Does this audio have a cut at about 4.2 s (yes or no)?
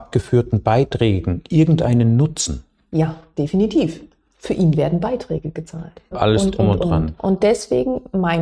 no